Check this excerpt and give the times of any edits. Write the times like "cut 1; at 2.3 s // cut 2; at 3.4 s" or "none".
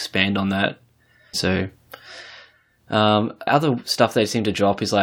cut 1; at 1.3 s // cut 2; at 3.5 s